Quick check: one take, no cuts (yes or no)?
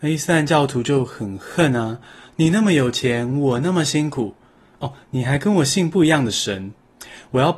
yes